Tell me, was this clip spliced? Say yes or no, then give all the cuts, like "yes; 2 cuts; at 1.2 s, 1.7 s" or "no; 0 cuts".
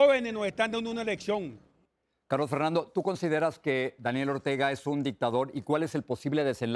no; 0 cuts